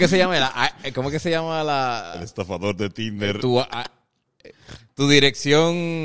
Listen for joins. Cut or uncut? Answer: uncut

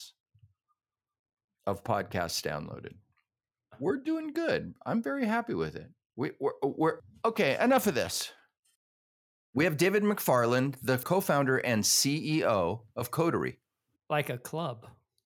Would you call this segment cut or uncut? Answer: cut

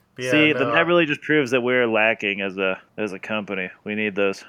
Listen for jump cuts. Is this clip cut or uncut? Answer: cut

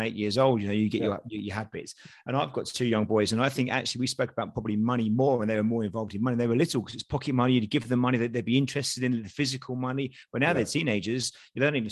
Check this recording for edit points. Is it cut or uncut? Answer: uncut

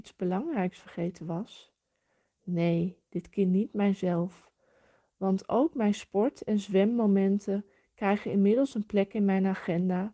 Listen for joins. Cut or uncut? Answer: uncut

